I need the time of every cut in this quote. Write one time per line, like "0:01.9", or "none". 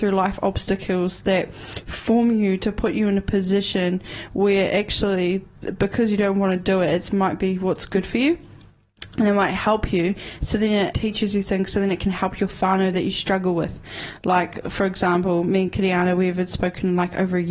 0:10.9